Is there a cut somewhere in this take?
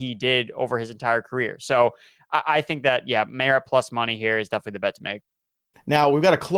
no; 0 cuts

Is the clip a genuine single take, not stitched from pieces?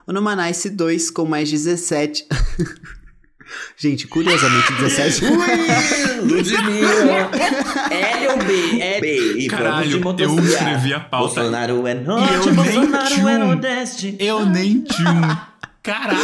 no; 1 cut; at 9.0 s

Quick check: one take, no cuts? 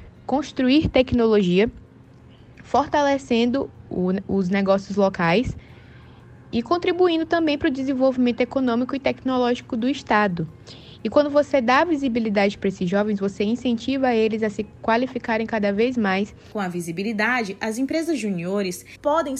no; 1 cut; at 3.9 s

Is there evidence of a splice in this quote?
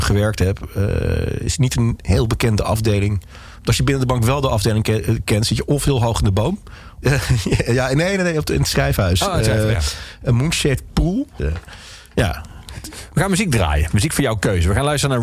yes; 3 cuts; at 3.5 s, 7.0 s, 11.4 s

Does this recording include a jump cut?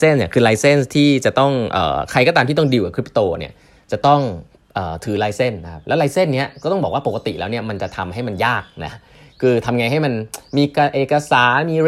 no; 0 cuts

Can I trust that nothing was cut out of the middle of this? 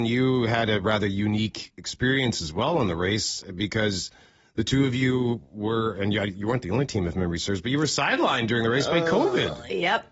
yes; 0 cuts

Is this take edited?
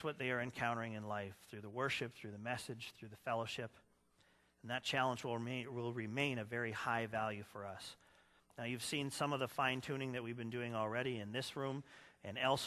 yes; 1 cut; at 8.4 s

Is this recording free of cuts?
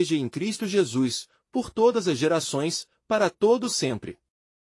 yes; 0 cuts

